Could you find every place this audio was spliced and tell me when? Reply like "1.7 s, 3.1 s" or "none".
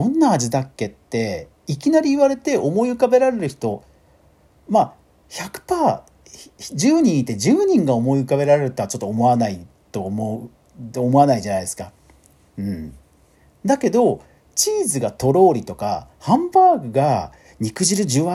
none